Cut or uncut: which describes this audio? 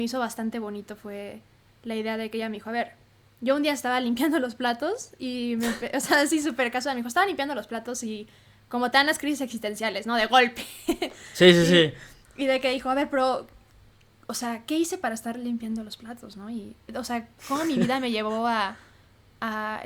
cut